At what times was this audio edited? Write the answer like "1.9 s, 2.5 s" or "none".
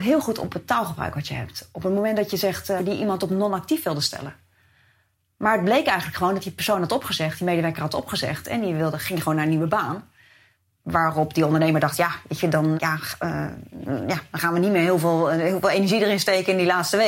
2.8 s, 12.8 s